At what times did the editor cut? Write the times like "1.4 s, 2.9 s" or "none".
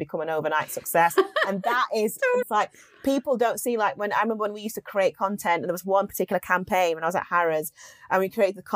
2.4 s